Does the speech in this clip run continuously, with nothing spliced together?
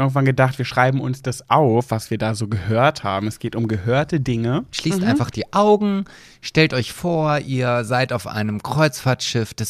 no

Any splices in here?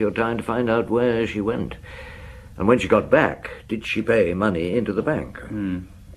no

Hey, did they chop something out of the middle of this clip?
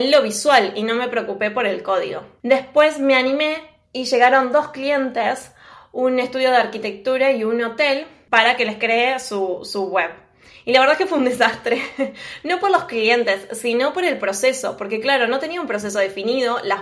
no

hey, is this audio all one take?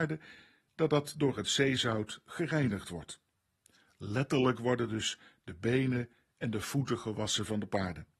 yes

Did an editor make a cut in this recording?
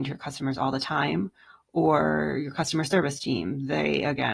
no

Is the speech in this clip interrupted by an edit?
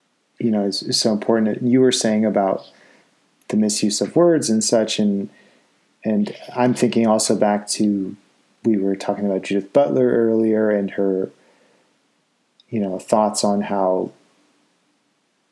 no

